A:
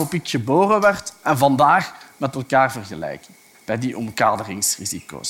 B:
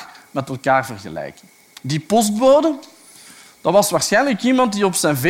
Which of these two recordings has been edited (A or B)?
A